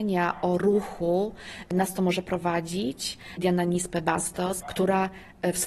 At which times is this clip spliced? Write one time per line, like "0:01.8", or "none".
0:03.4
0:04.6